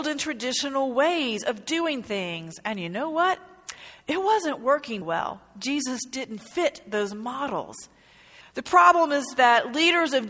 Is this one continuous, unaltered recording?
no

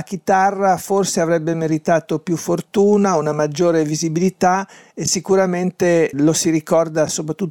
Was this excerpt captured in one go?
no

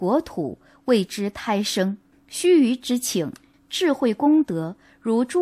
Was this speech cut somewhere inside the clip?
yes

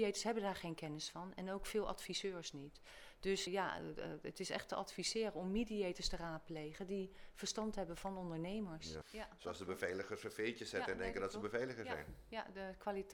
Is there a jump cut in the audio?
yes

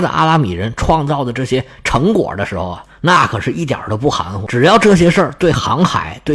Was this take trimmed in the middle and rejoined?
no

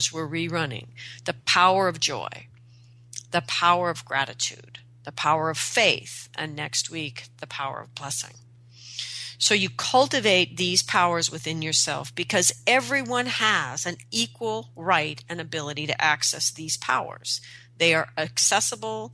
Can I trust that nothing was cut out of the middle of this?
yes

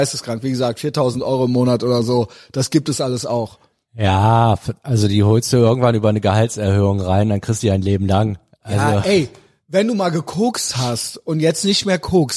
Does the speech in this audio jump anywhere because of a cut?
no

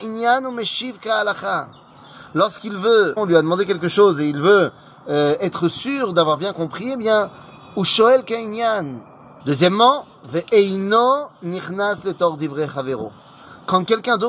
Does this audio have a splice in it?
yes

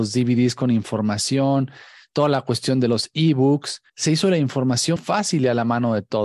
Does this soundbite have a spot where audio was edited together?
yes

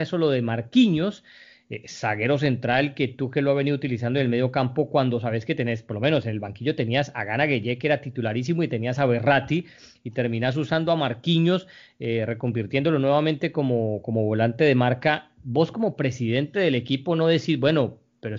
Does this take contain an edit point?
no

